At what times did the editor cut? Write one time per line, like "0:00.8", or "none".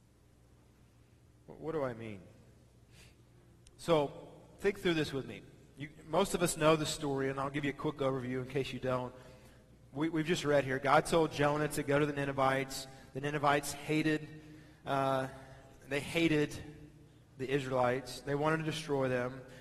none